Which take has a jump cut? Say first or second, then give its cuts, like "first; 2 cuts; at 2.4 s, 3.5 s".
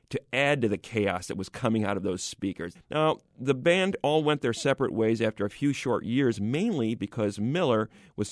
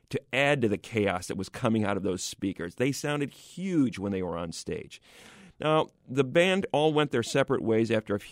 first; 1 cut; at 2.8 s